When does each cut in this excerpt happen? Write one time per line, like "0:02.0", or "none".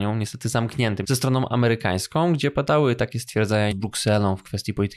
0:01.0
0:03.7

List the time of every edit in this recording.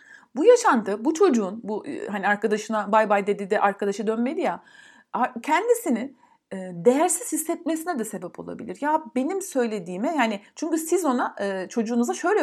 none

